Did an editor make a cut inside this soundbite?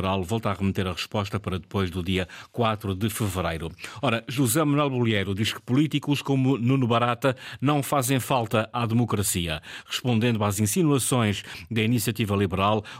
no; 0 cuts

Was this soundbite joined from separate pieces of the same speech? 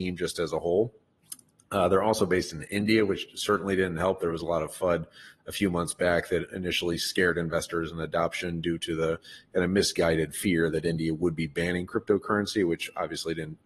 no; 0 cuts

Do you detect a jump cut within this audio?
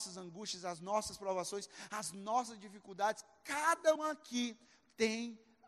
yes; 1 cut; at 4.0 s

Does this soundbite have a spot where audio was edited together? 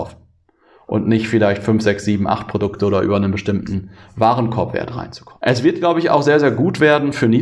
yes; 1 cut; at 5.4 s

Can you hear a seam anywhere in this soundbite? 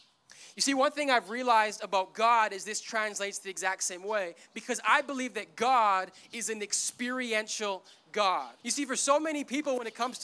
yes; 1 cut; at 8.6 s

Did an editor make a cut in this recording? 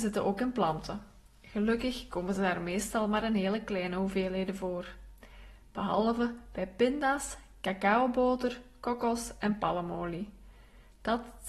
no; 0 cuts

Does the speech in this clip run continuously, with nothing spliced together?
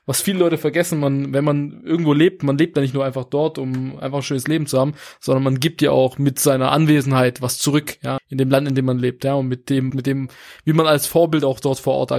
no; 2 cuts; at 8.2 s, 9.9 s

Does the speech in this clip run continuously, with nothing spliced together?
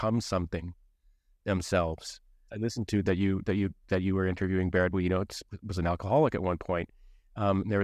no; 1 cut; at 2.5 s

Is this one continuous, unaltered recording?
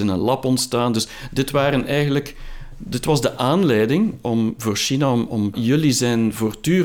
no; 1 cut; at 5.5 s

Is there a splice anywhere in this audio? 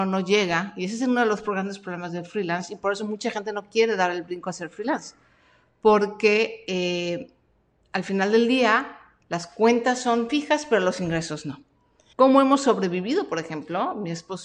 yes; 1 cut; at 12.1 s

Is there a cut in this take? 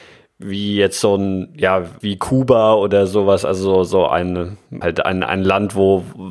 yes; 2 cuts; at 2.0 s, 4.8 s

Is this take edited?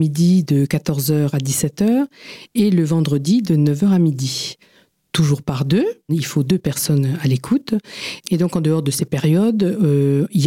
no; 0 cuts

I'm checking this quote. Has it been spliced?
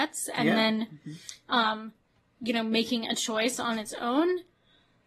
no; 0 cuts

